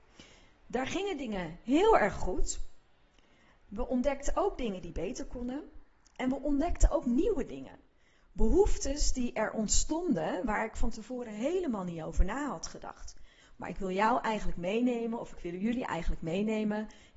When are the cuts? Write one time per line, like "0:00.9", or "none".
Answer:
0:13.4

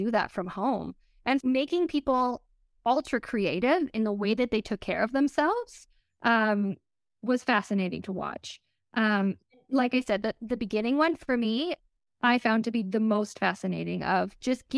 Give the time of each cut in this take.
0:01.4

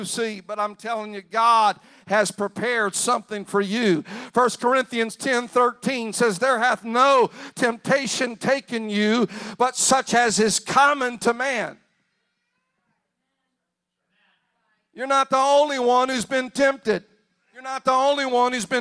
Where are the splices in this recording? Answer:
none

